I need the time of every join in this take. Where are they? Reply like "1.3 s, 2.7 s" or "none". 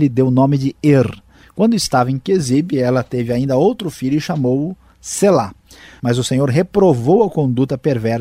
1.4 s, 6.0 s